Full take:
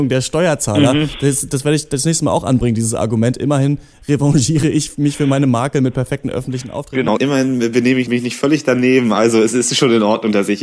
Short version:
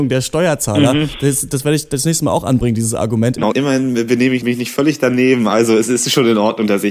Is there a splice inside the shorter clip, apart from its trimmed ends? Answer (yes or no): yes